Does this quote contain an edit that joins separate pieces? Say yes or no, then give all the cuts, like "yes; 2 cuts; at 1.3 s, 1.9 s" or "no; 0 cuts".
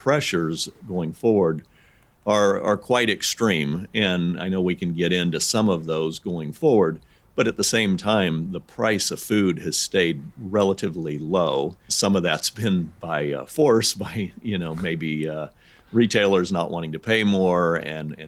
yes; 1 cut; at 11.9 s